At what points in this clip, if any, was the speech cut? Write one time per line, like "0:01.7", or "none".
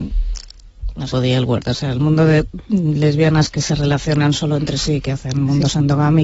0:01.1